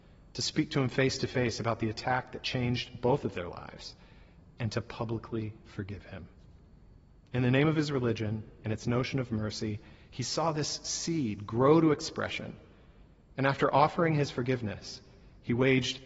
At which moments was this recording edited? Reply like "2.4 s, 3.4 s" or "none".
none